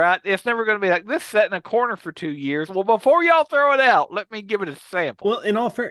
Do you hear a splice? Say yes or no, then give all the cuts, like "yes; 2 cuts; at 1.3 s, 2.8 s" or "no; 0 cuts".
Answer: no; 0 cuts